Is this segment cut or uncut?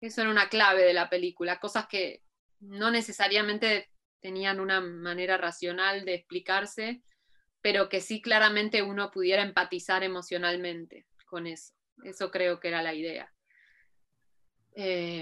uncut